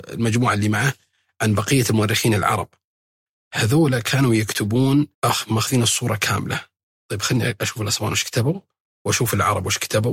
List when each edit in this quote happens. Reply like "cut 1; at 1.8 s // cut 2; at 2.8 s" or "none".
cut 1; at 5.1 s